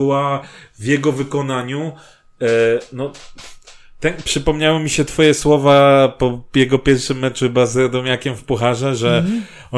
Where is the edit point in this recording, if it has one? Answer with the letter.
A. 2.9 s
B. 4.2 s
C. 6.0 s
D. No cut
B